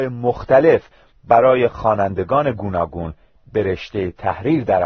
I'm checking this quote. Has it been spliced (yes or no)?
no